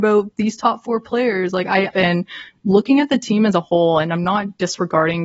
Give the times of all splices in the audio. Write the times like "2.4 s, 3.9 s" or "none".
1.9 s

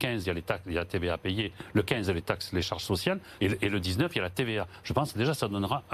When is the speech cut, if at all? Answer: 3.4 s, 4.8 s

